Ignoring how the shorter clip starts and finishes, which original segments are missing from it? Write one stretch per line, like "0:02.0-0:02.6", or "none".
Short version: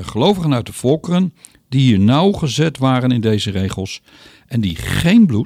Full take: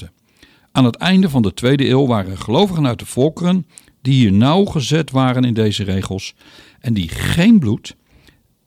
none